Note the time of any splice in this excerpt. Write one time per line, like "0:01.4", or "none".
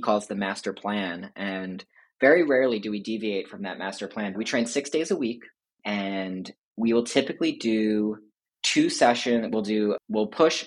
0:04.3